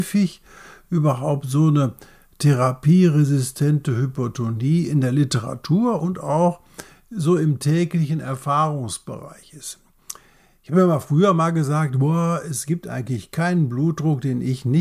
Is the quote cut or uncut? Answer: uncut